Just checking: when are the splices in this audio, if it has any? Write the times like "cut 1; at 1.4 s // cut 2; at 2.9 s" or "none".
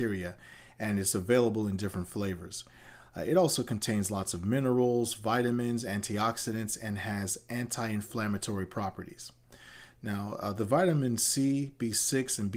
none